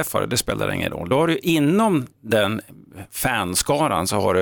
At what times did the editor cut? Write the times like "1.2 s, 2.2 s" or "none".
none